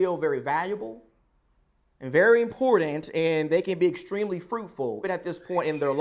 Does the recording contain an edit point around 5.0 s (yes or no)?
yes